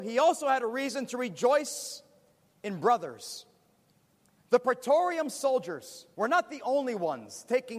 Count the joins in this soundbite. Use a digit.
2